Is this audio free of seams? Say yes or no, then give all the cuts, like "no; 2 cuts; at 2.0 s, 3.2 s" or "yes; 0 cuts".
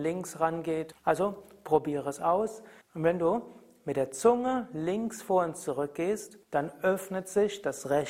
no; 3 cuts; at 0.9 s, 2.8 s, 6.4 s